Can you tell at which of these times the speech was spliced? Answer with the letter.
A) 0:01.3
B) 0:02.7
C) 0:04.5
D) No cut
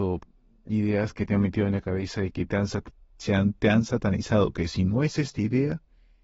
D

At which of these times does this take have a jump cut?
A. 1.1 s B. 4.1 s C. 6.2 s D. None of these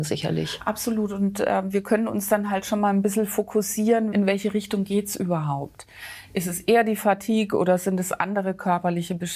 B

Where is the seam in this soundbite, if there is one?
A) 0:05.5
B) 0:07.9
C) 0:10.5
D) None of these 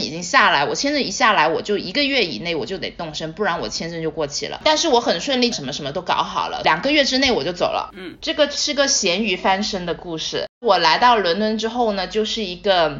A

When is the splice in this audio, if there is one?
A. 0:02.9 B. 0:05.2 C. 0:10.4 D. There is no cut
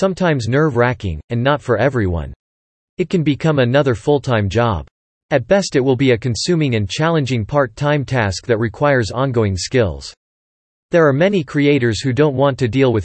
A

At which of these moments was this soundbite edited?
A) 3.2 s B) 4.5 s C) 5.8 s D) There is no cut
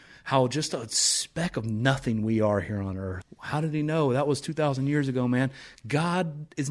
A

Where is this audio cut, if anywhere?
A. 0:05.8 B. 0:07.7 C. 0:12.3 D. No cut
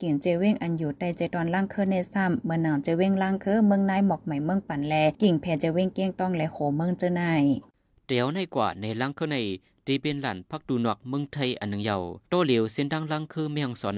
C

